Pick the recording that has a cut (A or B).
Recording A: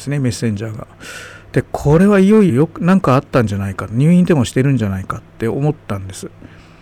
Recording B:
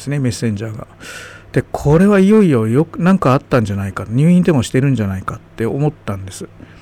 A